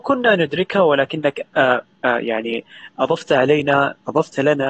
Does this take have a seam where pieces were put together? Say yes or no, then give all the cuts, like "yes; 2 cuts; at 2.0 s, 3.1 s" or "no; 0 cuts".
no; 0 cuts